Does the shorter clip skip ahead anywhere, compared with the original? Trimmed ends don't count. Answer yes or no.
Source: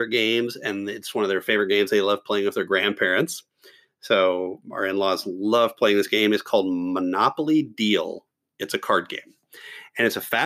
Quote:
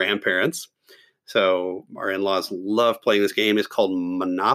no